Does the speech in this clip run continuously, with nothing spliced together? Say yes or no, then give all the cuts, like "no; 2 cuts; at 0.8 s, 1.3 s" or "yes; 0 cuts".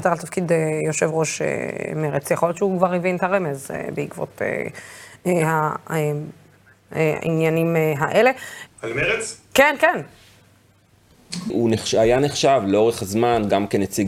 no; 2 cuts; at 8.7 s, 11.5 s